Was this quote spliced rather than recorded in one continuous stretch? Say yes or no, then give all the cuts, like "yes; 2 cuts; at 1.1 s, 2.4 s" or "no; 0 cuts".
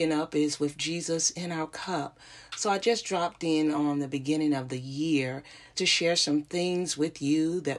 yes; 1 cut; at 5.7 s